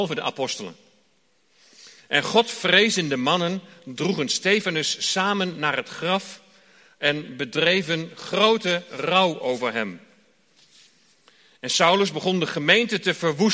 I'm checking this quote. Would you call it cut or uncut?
uncut